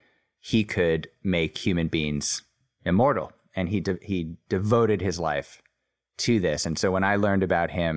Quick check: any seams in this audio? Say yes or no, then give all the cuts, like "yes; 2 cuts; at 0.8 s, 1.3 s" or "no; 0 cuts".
no; 0 cuts